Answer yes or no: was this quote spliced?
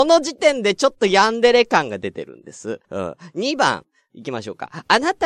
yes